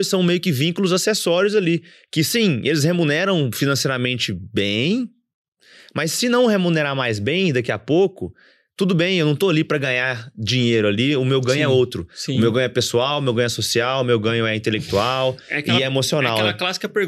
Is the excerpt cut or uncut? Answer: uncut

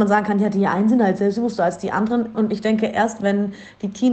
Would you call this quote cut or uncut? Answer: cut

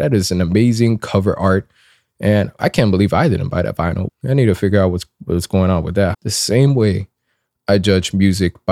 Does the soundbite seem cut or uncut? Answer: cut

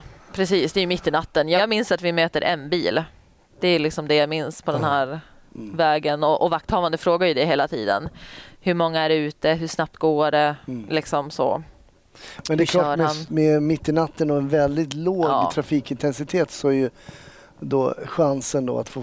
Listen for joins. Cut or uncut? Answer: uncut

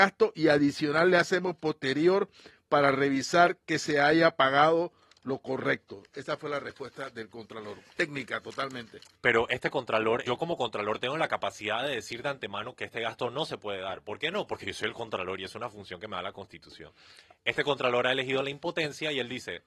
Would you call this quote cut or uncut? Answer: cut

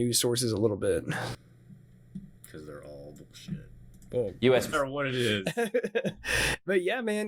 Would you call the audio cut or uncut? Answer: cut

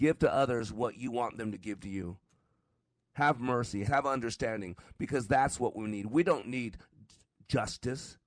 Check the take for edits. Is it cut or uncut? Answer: cut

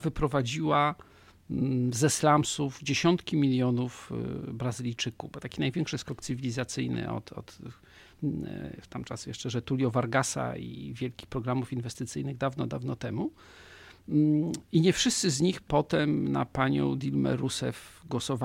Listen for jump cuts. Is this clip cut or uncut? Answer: uncut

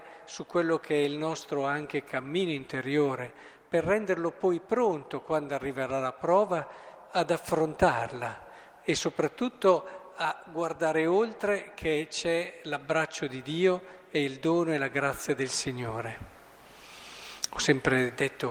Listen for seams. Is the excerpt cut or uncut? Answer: uncut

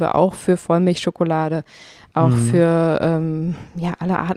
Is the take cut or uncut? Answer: uncut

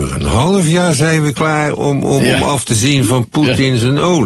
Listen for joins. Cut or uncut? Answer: cut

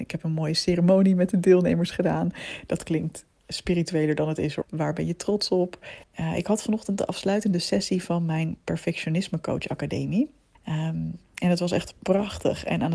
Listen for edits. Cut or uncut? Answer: cut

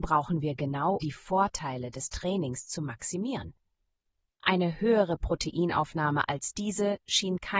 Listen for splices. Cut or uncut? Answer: cut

